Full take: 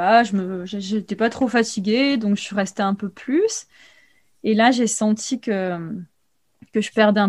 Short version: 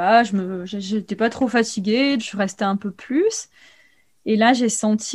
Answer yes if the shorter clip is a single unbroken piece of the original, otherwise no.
no